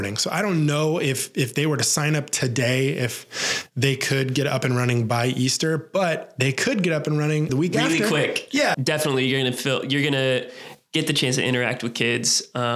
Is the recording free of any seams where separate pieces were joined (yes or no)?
no